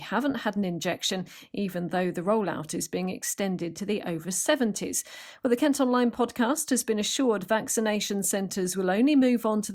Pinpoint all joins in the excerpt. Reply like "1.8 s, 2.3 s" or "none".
none